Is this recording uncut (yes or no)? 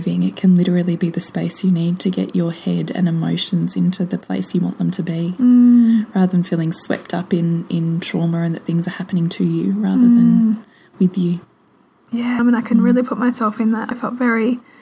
no